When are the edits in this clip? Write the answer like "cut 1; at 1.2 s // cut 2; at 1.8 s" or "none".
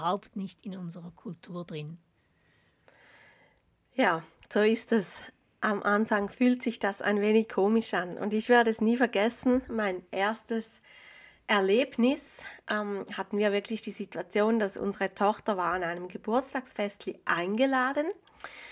cut 1; at 12.6 s